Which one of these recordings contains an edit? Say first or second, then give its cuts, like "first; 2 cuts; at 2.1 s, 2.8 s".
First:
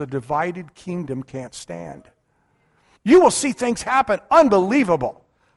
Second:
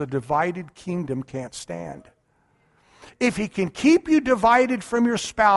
first; 1 cut; at 3.0 s